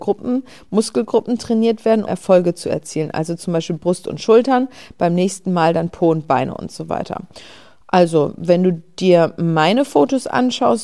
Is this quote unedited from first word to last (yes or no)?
no